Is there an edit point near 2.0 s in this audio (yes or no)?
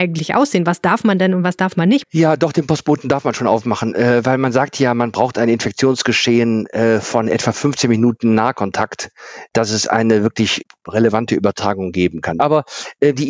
yes